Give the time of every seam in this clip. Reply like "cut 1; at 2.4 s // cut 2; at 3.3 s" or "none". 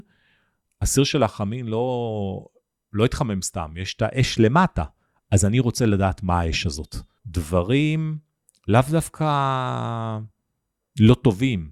cut 1; at 7.2 s